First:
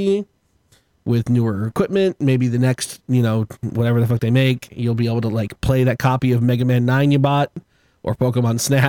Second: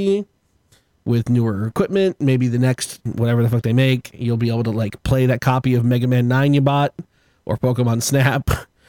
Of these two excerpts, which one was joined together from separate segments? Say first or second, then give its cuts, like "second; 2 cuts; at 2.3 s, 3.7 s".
second; 1 cut; at 3.0 s